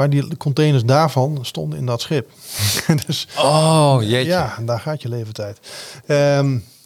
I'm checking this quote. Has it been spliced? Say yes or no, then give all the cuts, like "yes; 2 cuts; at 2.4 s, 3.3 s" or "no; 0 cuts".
no; 0 cuts